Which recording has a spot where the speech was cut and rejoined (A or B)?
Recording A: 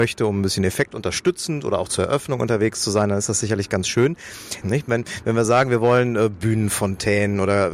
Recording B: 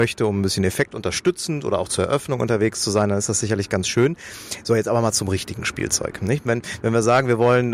A